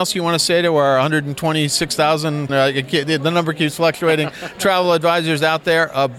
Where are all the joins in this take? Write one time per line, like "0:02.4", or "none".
0:02.5